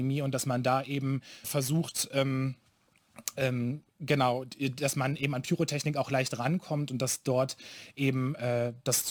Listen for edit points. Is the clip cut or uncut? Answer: cut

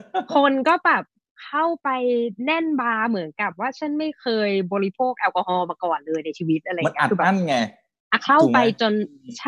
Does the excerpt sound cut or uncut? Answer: uncut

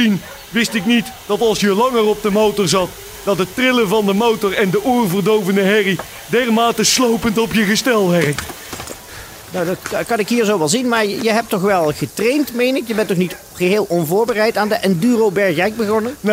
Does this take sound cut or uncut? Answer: uncut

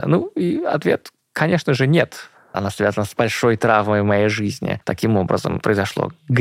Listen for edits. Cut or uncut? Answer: cut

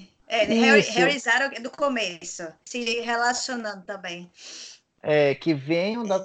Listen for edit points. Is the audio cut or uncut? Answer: cut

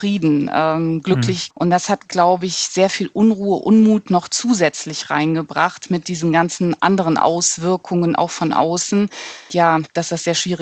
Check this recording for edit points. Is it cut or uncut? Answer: cut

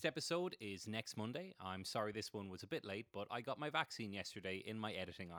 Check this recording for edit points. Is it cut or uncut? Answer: uncut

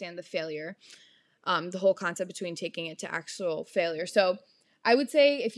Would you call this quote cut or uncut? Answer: uncut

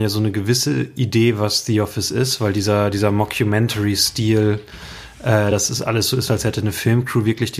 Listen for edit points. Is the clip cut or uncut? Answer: uncut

